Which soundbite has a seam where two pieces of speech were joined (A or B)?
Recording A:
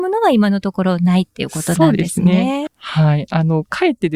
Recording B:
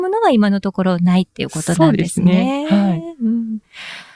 A